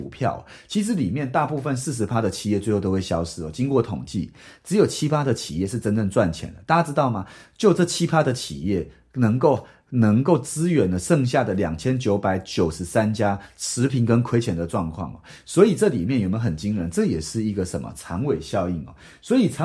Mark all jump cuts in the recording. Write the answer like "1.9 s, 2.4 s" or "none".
none